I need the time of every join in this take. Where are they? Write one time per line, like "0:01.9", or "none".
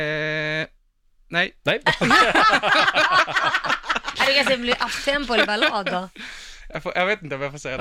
none